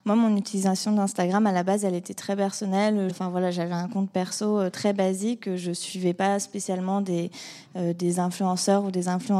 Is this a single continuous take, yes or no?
no